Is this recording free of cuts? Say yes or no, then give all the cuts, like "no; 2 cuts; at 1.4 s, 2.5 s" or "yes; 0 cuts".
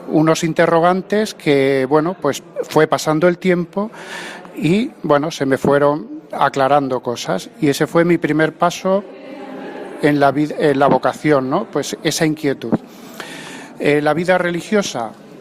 yes; 0 cuts